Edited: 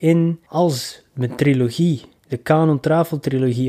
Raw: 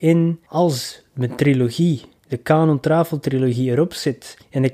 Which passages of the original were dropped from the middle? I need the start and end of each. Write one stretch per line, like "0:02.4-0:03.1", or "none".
none